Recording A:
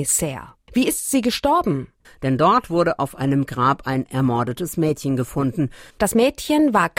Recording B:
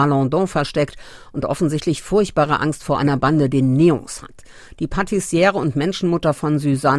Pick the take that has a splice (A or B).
A